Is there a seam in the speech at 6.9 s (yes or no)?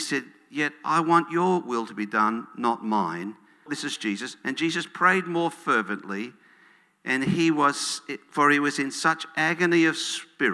no